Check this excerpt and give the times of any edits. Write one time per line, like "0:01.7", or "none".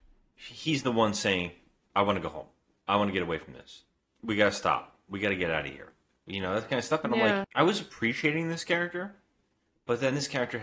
0:07.4